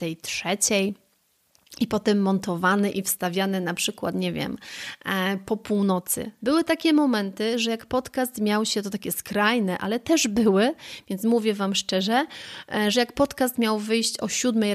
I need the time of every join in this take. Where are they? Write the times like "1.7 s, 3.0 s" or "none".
6.4 s